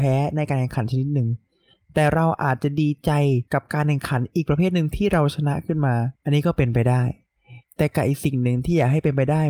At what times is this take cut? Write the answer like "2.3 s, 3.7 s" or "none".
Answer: 3.5 s, 6.1 s

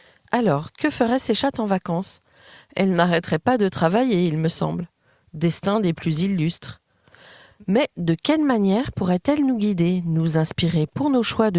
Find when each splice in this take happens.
none

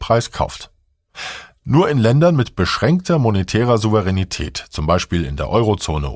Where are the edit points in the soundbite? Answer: none

